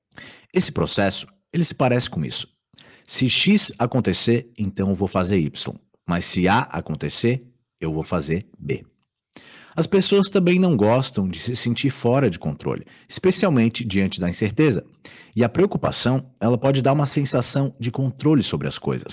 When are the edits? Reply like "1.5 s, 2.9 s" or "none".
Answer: none